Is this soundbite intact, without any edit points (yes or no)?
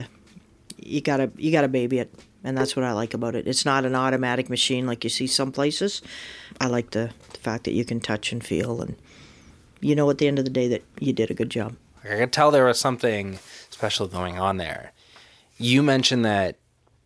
yes